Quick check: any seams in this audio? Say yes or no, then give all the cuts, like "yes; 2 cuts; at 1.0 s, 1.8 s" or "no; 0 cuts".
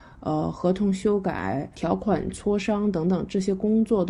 yes; 1 cut; at 1.7 s